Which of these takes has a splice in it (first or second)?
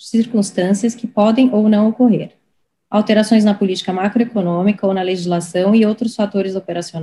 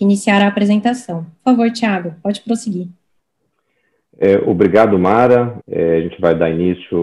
second